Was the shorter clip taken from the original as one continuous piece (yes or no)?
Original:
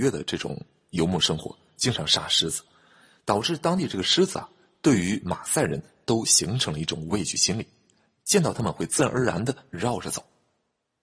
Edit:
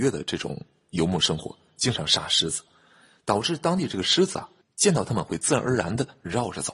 no